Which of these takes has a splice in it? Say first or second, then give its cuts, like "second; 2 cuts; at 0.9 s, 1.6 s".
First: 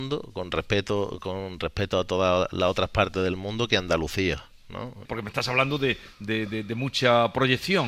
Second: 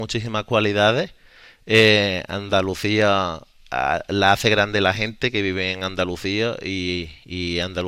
first; 1 cut; at 5.0 s